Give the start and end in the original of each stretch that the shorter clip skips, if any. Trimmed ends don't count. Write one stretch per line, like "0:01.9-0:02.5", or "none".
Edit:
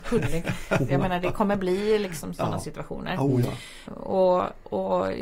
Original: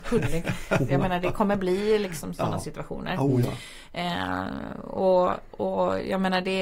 0:03.9-0:04.7